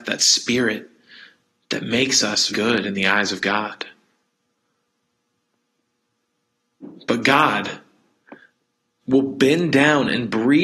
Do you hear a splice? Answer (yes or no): yes